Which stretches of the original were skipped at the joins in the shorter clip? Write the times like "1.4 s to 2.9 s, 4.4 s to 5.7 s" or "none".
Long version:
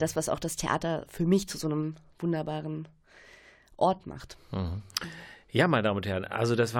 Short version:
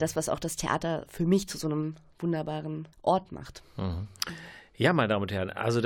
2.9 s to 3.7 s